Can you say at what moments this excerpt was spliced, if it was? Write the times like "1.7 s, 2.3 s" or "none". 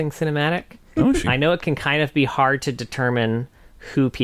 1.2 s

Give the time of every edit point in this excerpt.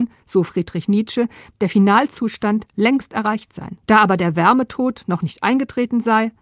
1.5 s, 3.8 s

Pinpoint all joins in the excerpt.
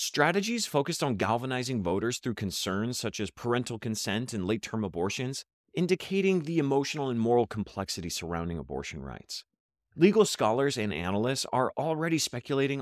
none

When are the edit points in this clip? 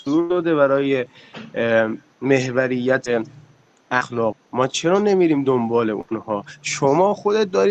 4.3 s

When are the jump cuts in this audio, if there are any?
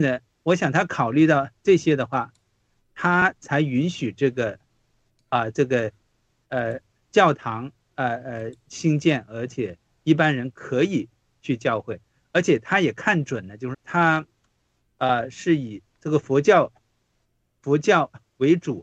13.7 s

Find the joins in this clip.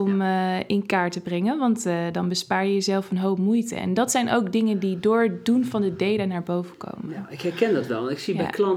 none

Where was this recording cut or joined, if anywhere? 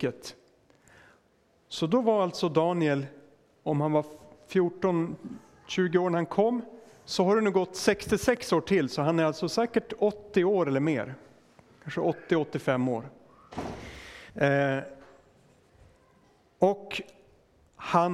14.3 s

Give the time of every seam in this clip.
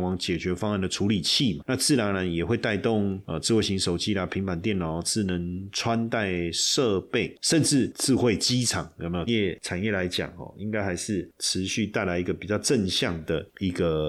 9.3 s

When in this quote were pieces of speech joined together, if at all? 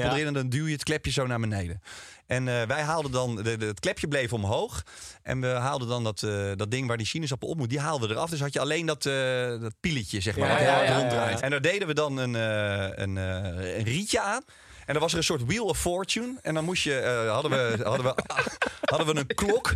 11.4 s

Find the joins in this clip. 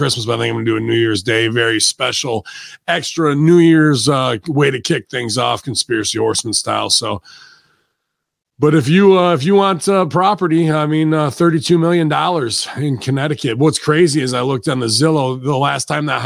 none

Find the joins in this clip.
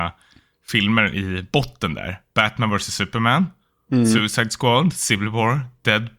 none

